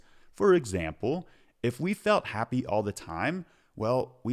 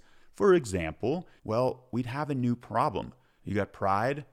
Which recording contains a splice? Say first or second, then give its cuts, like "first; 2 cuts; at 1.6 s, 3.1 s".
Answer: second; 2 cuts; at 1.4 s, 3.4 s